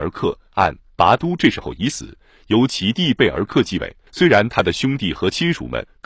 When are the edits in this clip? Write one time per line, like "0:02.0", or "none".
0:04.1